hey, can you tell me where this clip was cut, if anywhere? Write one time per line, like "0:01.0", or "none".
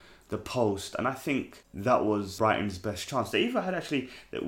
0:02.4